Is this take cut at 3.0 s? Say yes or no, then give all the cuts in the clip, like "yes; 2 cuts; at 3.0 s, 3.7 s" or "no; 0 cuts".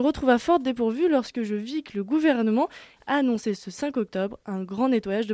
yes; 1 cut; at 3.0 s